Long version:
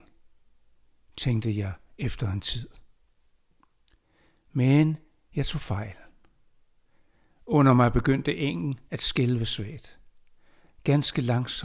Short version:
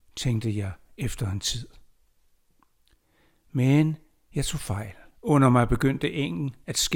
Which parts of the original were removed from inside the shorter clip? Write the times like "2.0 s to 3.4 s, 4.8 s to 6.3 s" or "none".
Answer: 6.1 s to 7.3 s